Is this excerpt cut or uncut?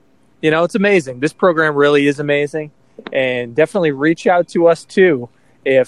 uncut